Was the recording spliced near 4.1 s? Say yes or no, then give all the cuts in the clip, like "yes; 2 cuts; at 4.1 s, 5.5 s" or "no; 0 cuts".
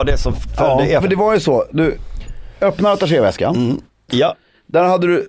yes; 2 cuts; at 1.0 s, 4.1 s